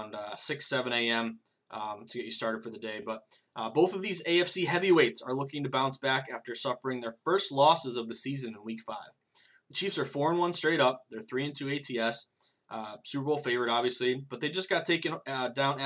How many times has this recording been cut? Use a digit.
0